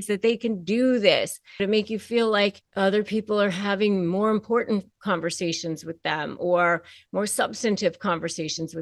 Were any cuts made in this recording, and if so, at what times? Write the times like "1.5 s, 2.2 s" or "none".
1.6 s, 2.7 s